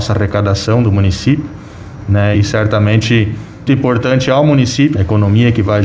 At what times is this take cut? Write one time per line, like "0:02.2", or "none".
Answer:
0:02.3
0:03.7
0:04.9